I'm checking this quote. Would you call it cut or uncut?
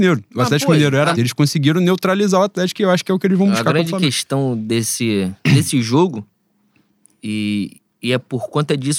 cut